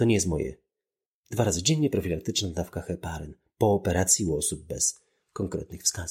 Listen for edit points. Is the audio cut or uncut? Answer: uncut